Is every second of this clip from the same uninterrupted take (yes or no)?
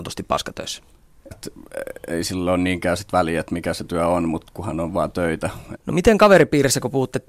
no